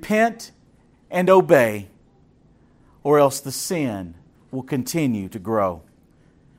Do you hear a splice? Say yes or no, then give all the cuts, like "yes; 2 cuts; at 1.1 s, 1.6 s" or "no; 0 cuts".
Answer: no; 0 cuts